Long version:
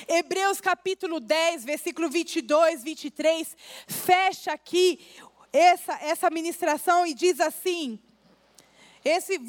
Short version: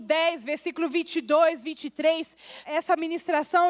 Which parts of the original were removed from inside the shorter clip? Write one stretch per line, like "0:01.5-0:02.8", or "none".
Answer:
0:03.8-0:06.0

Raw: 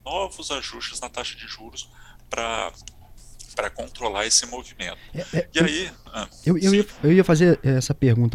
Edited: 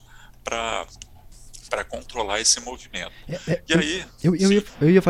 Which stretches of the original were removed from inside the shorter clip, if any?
0:06.0-0:06.4

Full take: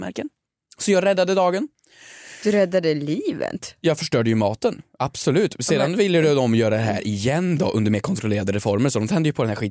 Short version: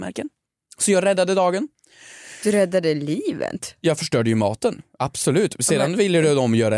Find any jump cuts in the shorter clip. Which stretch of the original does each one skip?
none

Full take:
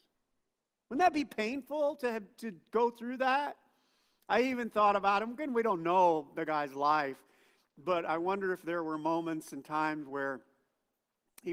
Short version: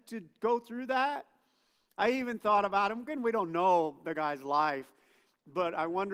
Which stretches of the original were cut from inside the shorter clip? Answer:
none

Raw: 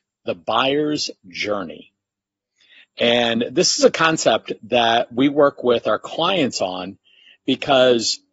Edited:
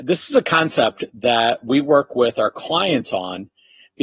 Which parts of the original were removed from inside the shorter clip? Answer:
none

